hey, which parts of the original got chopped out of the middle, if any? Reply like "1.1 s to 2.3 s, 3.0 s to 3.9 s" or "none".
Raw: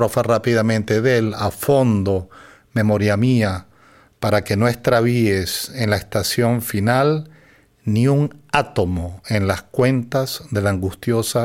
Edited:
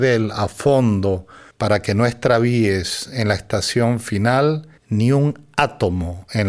2.5 s to 4.1 s, 7.4 s to 7.7 s